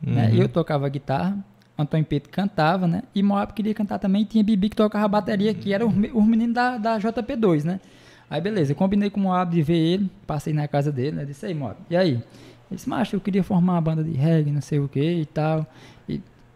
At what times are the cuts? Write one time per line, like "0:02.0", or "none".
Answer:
none